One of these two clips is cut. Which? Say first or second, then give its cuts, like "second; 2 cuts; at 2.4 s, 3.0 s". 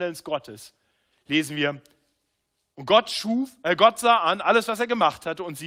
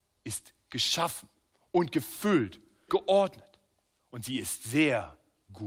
second; 1 cut; at 2.9 s